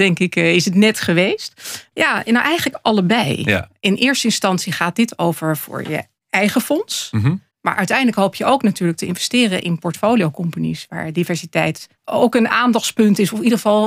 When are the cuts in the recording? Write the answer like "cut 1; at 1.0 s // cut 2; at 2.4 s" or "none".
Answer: cut 1; at 1.9 s // cut 2; at 12.0 s